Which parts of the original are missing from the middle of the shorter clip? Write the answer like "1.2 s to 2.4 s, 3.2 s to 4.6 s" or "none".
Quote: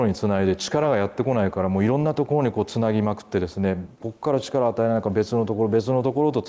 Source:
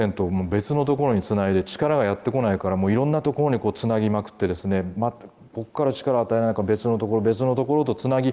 4.9 s to 5.4 s